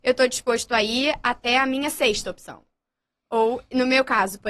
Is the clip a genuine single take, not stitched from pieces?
yes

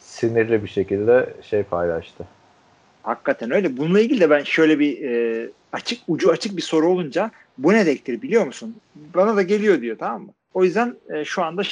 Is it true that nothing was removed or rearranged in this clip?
no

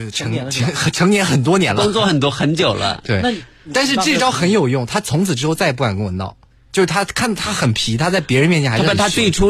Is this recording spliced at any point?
no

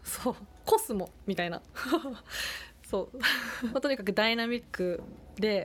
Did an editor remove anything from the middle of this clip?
yes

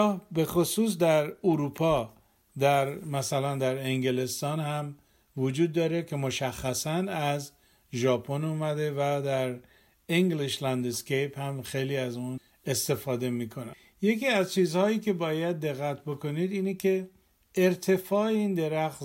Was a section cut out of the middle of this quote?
no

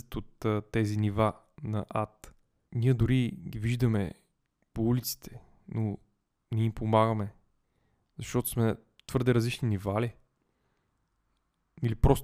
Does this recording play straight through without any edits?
yes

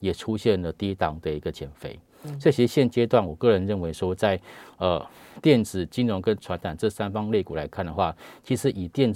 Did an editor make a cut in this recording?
no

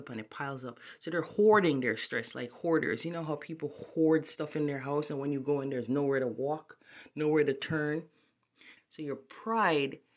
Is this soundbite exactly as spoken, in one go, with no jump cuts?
no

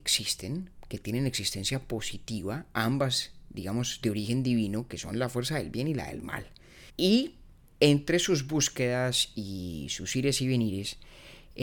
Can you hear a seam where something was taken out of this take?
yes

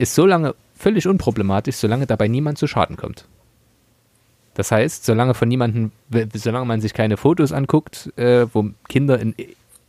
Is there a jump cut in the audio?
no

